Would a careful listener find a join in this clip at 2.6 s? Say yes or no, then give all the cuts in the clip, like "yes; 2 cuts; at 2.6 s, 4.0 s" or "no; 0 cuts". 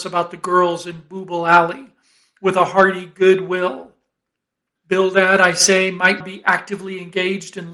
no; 2 cuts; at 4.8 s, 6.2 s